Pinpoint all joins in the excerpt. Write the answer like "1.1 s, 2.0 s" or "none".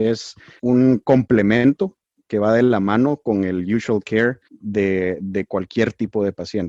4.4 s